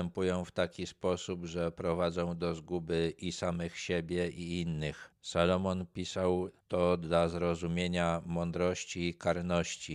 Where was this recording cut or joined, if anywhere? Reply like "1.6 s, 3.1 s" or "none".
5.1 s